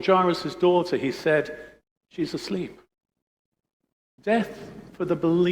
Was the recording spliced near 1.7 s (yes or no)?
no